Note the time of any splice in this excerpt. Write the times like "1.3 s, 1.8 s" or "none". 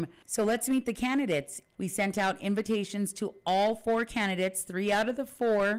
1.7 s